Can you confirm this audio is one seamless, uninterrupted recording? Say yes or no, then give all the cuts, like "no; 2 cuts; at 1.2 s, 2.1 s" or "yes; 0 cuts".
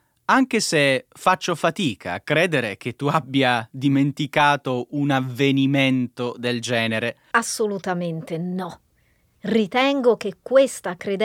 no; 1 cut; at 7.3 s